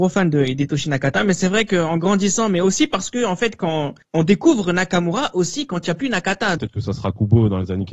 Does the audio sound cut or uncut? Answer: cut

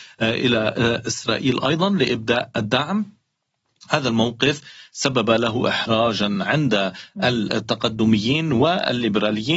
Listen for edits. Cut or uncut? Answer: uncut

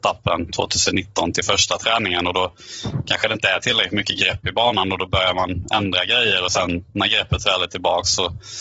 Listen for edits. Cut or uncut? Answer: uncut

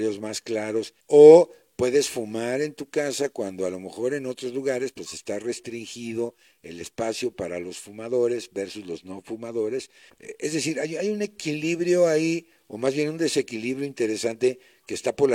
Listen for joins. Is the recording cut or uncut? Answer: cut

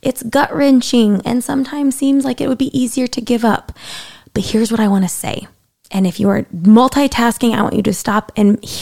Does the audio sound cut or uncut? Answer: cut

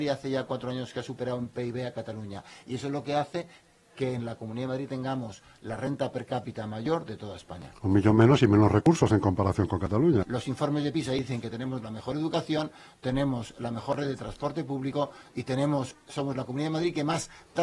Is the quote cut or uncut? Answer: cut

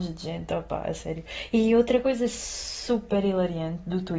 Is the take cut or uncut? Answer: uncut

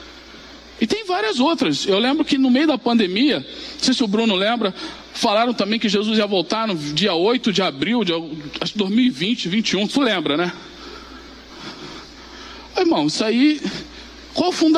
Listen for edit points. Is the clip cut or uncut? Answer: uncut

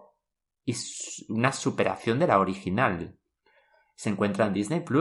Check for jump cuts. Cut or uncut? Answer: uncut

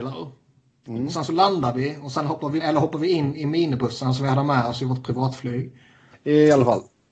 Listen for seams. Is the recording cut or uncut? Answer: cut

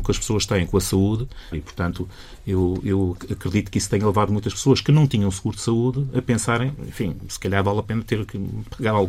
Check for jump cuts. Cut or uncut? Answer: cut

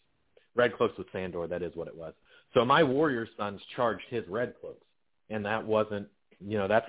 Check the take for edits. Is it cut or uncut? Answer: uncut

